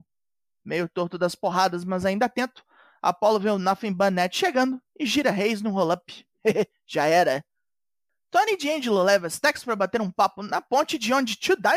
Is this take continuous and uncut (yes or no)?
yes